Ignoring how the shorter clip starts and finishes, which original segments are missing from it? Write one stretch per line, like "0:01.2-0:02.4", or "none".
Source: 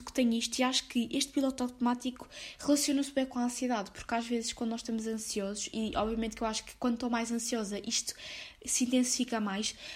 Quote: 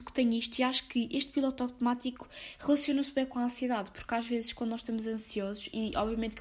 none